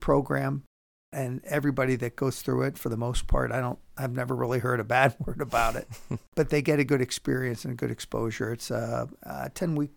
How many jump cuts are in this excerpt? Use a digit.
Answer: 0